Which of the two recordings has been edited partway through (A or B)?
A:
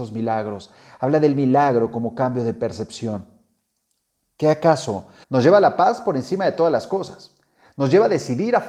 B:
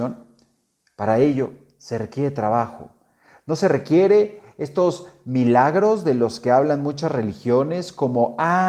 A